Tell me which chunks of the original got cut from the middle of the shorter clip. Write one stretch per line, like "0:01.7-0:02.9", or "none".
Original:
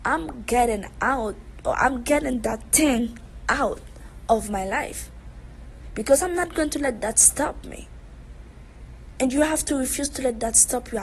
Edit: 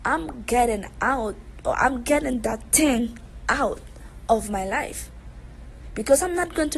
none